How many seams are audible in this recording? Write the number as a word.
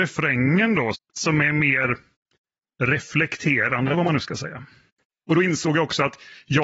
one